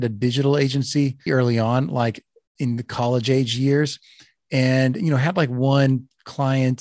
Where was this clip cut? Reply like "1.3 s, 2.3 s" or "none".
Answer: 1.3 s